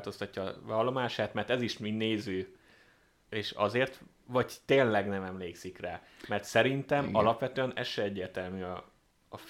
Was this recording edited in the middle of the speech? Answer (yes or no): yes